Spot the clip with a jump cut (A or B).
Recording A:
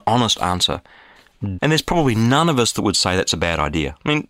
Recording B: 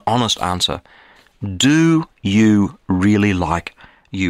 A